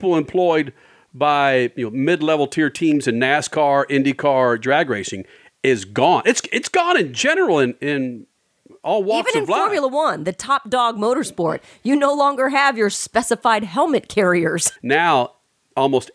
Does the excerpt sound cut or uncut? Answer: cut